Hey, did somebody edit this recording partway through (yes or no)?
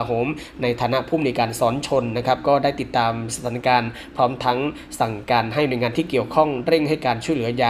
no